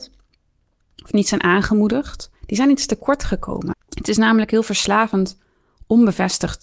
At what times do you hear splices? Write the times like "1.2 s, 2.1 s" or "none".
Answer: 2.4 s, 3.7 s